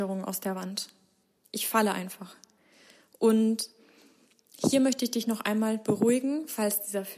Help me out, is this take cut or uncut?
uncut